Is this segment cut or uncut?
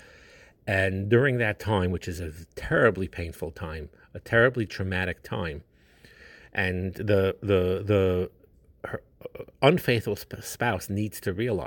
uncut